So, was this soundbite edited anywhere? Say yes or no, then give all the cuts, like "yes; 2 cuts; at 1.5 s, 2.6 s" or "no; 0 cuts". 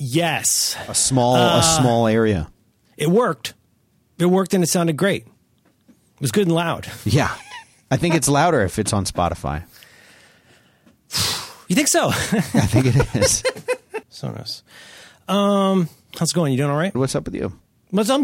yes; 2 cuts; at 14.0 s, 16.9 s